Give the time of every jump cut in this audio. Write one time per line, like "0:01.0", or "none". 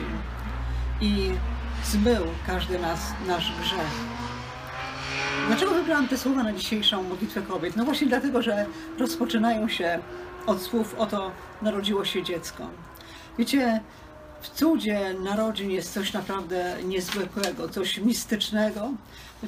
0:17.7